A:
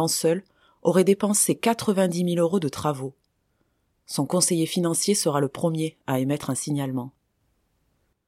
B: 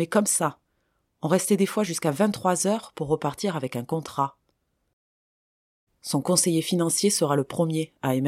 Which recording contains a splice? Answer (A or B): B